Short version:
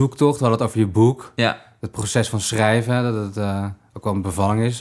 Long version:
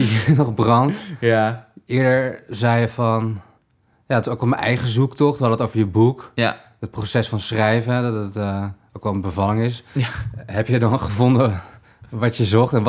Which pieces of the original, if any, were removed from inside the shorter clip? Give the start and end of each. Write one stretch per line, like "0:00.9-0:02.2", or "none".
none